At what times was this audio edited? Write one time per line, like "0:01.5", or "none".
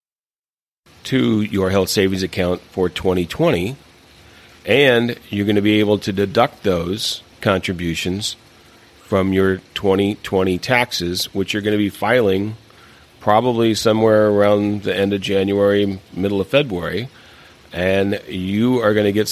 0:07.3